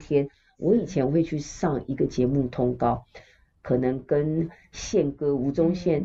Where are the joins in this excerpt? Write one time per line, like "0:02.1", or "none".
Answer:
none